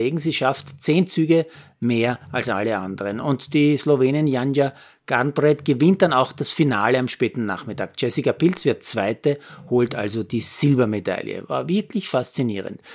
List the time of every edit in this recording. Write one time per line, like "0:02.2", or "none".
none